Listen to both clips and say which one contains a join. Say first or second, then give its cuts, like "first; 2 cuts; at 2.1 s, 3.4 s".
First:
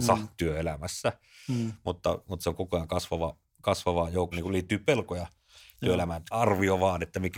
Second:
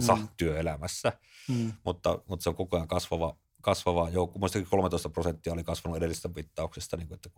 first; 2 cuts; at 4.3 s, 6.3 s